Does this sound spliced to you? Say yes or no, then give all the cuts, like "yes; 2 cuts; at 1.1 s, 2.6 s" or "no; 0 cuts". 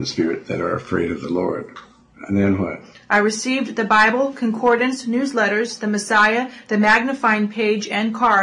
no; 0 cuts